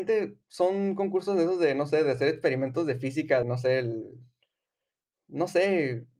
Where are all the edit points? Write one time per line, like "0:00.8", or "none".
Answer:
0:03.4